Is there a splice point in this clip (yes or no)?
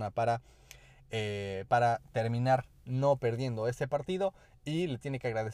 no